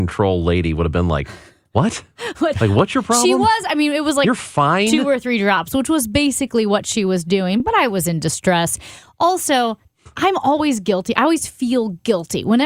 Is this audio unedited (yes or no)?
yes